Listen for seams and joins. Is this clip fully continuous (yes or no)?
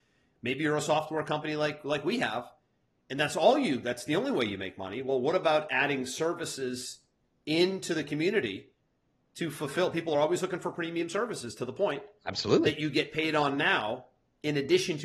yes